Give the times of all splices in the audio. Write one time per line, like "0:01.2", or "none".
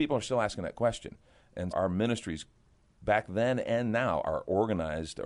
0:01.7

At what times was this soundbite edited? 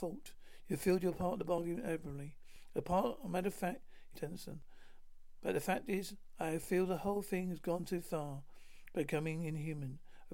0:04.1

